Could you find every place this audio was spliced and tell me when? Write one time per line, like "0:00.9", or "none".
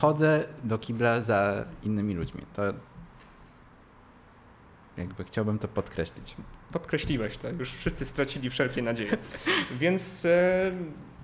none